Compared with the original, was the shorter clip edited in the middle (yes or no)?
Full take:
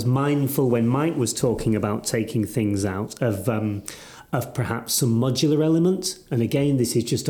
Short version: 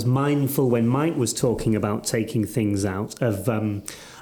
no